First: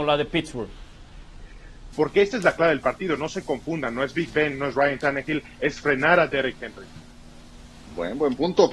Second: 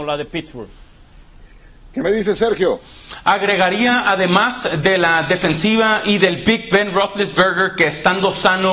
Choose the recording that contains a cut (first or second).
first